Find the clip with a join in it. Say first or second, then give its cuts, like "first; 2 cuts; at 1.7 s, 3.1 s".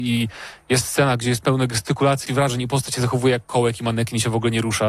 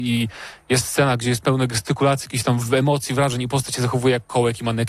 first; 1 cut; at 2.3 s